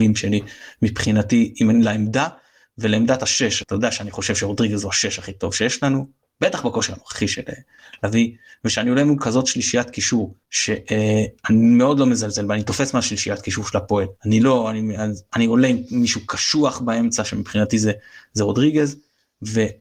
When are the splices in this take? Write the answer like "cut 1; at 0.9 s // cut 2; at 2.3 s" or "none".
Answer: cut 1; at 3.6 s // cut 2; at 10.4 s // cut 3; at 14.2 s